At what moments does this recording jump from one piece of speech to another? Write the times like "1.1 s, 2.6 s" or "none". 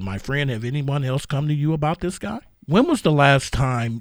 2.5 s